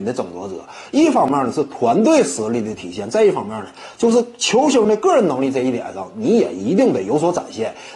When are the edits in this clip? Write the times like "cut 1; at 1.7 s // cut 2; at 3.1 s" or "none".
none